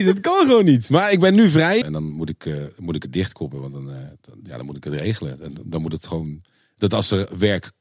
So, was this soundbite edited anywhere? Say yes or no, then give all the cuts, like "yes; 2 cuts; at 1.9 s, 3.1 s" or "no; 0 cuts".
yes; 1 cut; at 1.8 s